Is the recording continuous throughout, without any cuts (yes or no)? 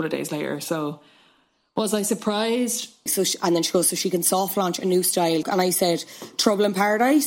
no